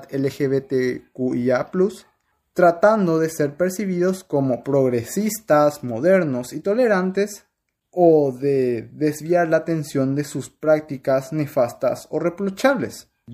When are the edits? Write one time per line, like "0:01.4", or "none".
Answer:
none